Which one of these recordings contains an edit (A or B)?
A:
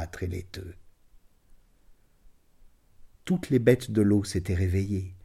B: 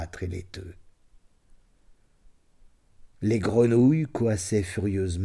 B